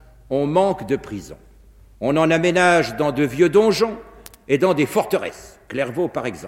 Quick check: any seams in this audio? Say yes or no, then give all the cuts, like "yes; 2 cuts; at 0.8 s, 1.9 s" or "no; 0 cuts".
no; 0 cuts